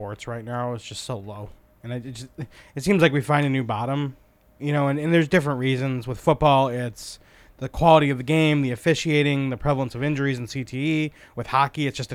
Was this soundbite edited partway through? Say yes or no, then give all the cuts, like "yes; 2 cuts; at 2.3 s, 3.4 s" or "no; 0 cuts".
no; 0 cuts